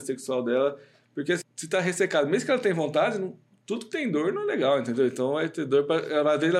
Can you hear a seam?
yes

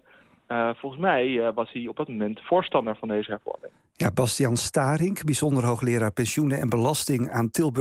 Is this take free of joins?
yes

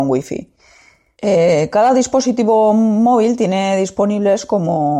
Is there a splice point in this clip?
yes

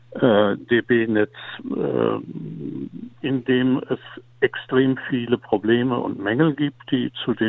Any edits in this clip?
yes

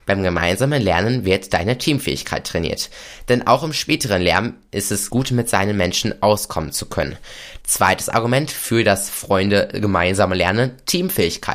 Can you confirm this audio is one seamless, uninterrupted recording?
no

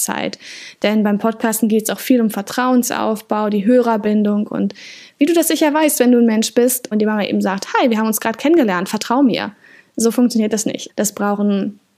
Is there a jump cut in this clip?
yes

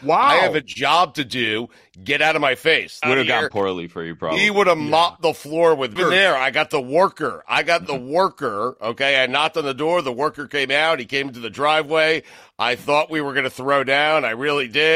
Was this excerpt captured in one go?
no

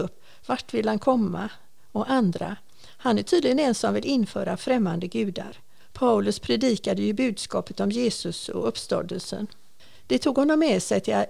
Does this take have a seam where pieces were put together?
no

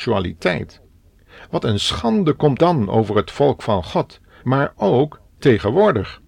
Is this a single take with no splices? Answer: no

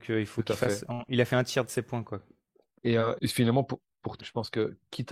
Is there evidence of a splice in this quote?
yes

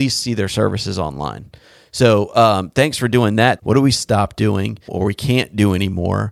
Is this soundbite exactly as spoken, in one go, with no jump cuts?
no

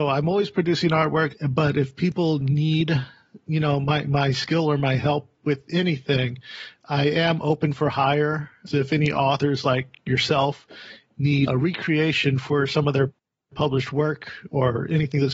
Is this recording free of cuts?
no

